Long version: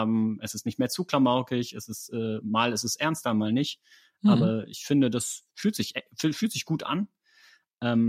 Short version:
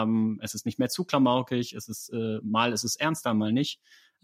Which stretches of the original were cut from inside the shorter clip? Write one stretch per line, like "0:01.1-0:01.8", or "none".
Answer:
none

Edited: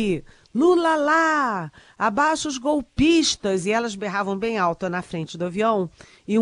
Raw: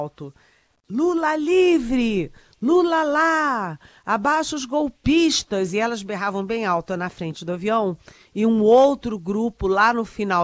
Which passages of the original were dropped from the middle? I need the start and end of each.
none

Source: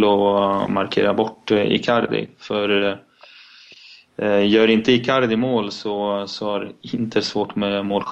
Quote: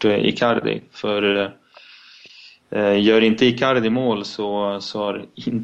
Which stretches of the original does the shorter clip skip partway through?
none

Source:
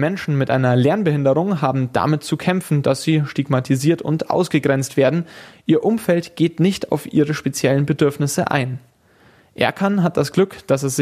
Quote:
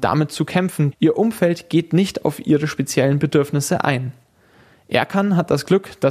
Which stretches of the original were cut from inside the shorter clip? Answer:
0:02.8-0:05.6

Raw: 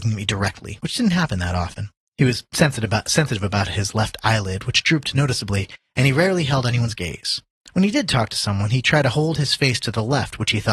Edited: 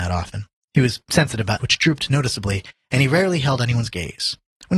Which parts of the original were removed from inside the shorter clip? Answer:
0:03.0-0:04.6

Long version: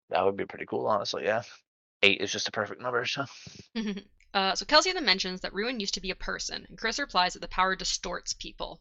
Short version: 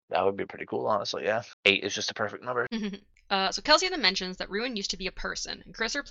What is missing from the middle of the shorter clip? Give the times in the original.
0:01.5-0:01.9
0:03.0-0:03.7

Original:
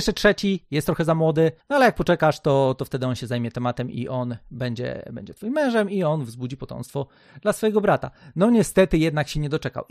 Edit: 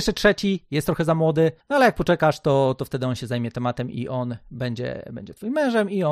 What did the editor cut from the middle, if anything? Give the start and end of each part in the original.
none

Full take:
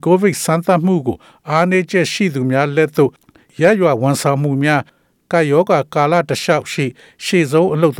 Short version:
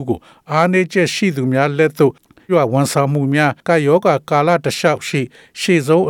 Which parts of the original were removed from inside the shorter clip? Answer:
0:03.5-0:03.8
0:04.9-0:05.2

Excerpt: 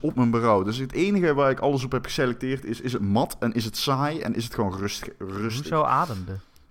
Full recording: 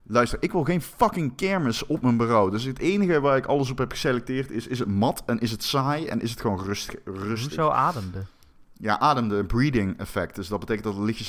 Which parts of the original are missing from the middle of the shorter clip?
none

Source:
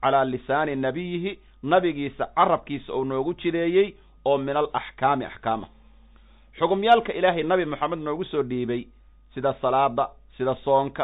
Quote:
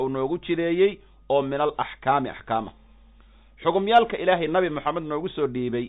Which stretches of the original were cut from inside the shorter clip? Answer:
none

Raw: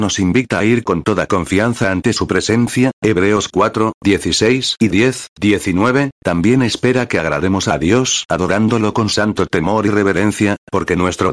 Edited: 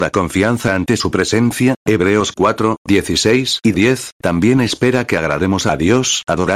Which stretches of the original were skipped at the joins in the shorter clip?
0:05.3-0:06.1

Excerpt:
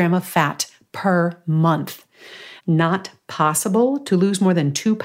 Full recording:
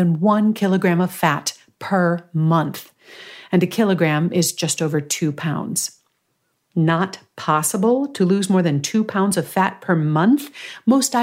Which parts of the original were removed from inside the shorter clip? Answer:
0:03.4-0:06.7

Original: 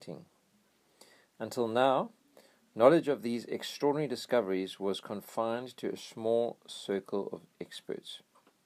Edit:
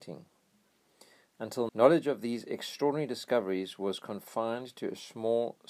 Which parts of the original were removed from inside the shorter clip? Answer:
0:01.7-0:02.7

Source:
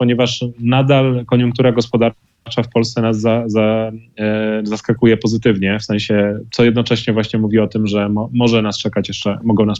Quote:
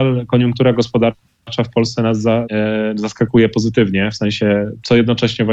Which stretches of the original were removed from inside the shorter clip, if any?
0:03.4-0:04.1

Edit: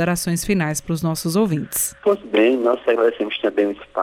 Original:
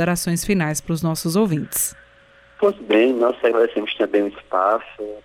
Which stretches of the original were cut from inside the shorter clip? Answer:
0:02.0-0:02.5

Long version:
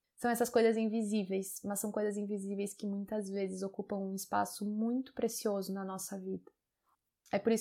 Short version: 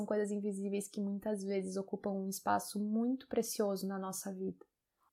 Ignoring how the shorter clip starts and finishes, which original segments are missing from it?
none

